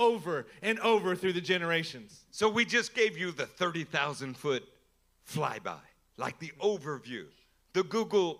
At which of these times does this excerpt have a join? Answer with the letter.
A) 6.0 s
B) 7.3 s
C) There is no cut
C